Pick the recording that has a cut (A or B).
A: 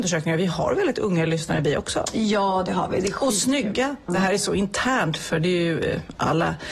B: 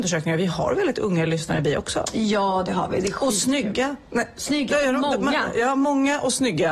A